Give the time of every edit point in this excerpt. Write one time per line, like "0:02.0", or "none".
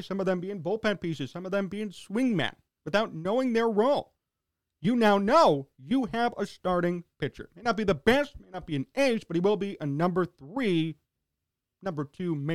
none